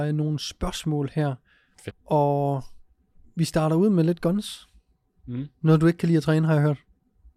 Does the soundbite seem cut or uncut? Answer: cut